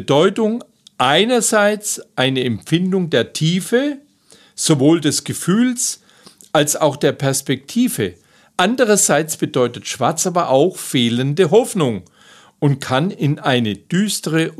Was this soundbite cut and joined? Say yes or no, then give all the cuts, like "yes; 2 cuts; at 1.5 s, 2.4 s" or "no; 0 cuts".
no; 0 cuts